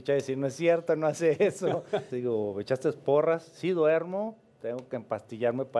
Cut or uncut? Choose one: cut